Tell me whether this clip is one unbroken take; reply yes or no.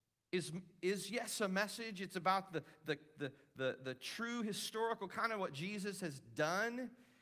yes